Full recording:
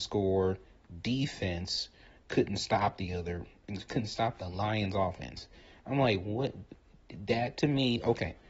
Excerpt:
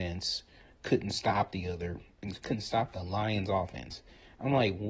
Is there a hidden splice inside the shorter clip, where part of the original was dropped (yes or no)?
no